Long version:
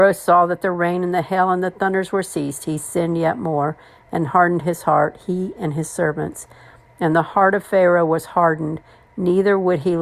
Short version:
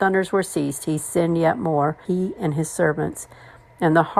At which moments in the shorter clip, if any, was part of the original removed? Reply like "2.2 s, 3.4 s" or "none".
2.0 s